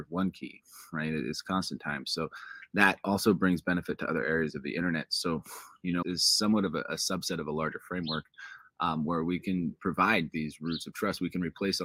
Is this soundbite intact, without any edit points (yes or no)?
no